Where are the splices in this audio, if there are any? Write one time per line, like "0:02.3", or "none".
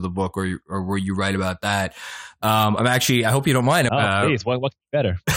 0:03.9